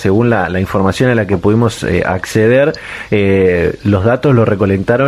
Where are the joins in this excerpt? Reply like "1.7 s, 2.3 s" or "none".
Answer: none